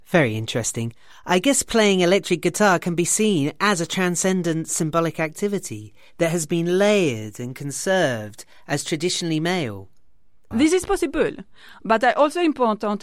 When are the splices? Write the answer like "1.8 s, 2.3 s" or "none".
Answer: 10.5 s